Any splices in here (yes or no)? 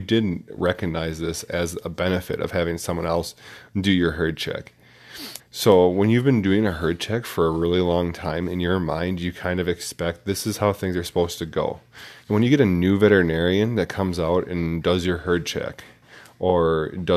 yes